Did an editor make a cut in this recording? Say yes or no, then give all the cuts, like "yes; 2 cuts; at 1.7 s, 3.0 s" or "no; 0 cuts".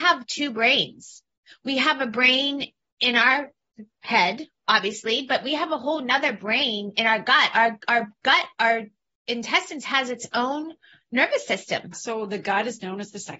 yes; 1 cut; at 11.9 s